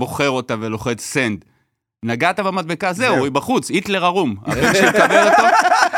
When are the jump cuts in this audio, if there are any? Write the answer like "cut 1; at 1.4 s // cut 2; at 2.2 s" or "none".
none